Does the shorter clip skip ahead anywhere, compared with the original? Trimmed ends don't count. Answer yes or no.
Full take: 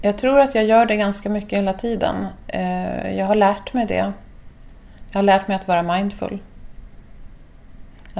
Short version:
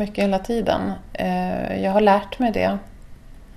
no